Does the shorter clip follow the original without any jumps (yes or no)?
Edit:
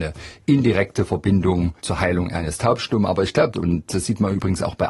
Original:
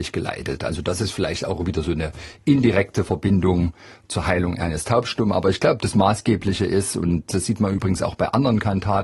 no